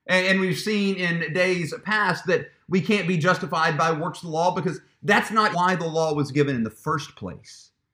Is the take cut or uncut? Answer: cut